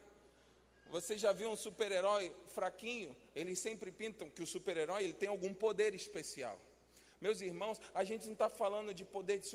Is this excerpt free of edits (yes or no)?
yes